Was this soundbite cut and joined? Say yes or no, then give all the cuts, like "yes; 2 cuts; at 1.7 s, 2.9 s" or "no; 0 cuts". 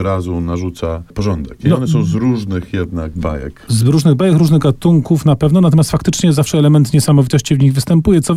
no; 0 cuts